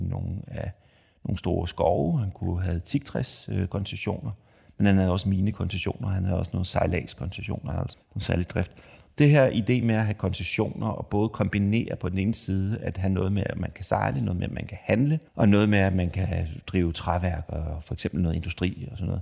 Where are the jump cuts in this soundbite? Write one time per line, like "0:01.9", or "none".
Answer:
0:07.9
0:15.3